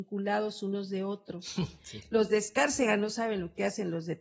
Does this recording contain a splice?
no; 0 cuts

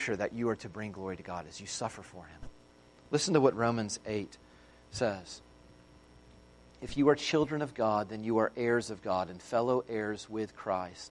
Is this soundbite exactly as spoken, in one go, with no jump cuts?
yes; 0 cuts

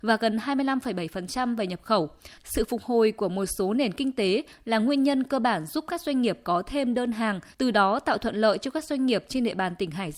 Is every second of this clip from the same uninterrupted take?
no; 2 cuts; at 2.4 s, 7.5 s

